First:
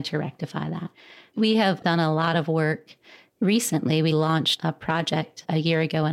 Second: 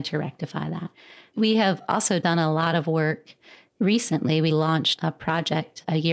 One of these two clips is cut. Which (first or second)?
first